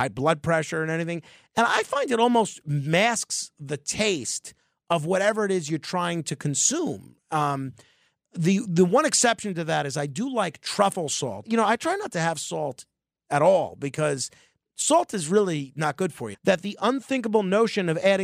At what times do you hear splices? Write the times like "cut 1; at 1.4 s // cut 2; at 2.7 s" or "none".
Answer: cut 1; at 11.4 s // cut 2; at 16.3 s